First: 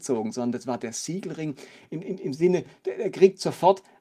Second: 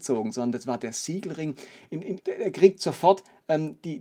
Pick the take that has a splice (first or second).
second